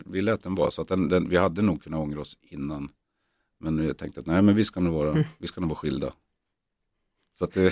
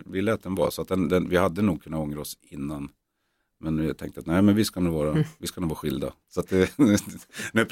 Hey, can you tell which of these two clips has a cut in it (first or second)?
second